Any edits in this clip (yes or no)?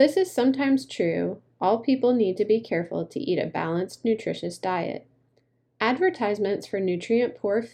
yes